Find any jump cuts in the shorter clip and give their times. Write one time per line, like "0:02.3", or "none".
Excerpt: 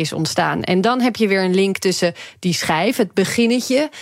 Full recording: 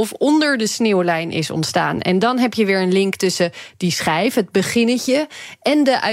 none